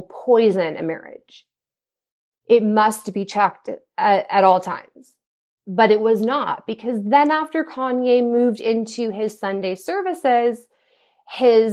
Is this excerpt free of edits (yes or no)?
yes